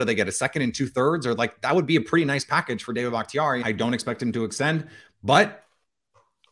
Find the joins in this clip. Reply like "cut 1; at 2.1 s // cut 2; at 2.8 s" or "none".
cut 1; at 3.6 s